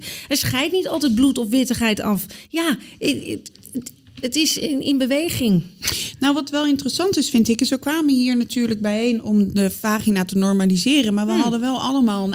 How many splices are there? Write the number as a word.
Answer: zero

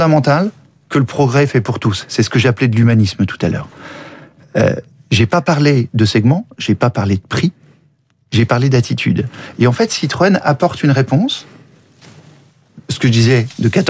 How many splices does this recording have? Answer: zero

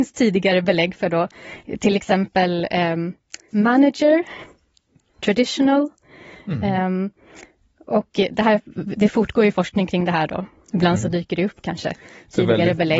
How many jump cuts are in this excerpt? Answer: one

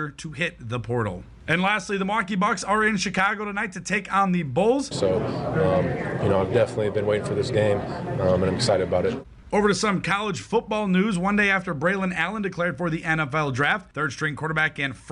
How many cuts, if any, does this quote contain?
one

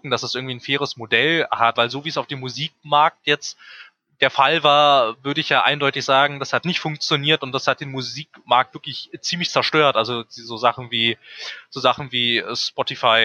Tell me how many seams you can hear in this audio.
one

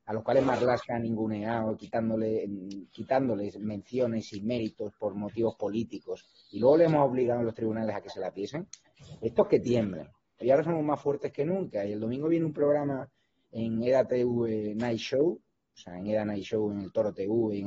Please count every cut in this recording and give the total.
one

